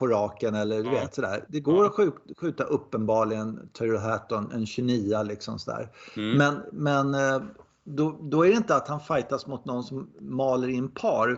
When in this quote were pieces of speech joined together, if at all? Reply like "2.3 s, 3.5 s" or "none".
none